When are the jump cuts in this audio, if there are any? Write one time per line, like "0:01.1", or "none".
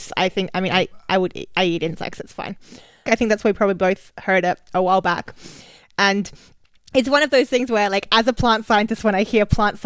0:03.1